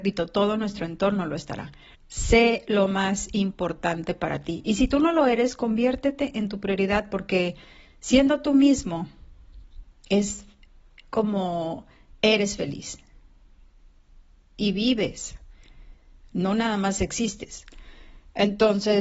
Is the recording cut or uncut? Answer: cut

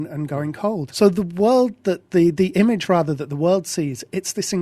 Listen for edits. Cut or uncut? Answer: cut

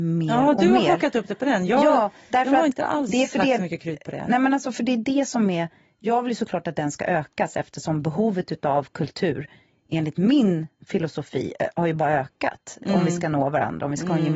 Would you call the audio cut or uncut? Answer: uncut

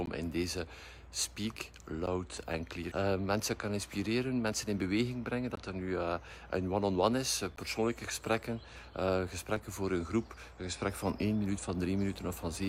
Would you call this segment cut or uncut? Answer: cut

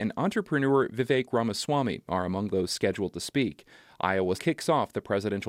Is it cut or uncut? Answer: cut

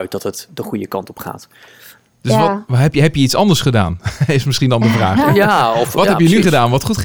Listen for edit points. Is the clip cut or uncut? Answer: uncut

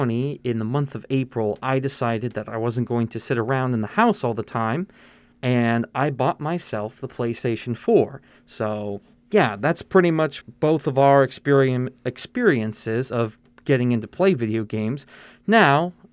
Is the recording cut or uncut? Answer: cut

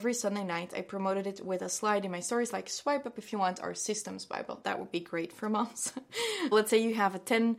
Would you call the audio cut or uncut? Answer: cut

